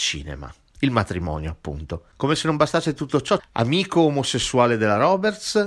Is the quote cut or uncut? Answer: cut